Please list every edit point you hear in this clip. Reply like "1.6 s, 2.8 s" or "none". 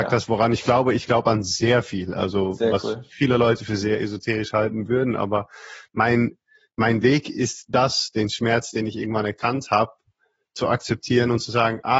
none

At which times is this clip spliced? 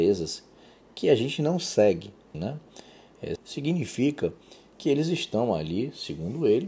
2.3 s, 3.4 s

